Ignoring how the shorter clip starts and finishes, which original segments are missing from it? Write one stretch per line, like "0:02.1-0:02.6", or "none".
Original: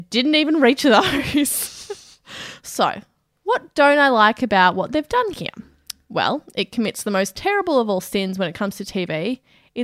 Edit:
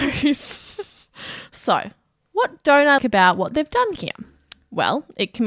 0:04.1-0:04.4